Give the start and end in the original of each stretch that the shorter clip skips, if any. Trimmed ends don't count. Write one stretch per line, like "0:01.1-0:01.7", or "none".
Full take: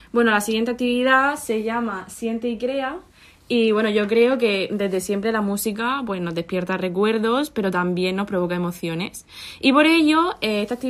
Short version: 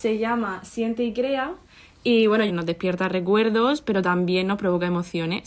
0:03.9-0:06.2